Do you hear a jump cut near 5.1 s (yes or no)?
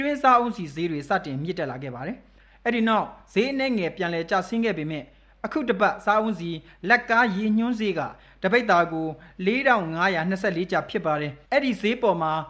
no